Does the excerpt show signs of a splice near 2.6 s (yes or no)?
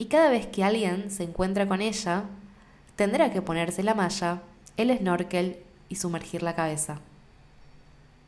no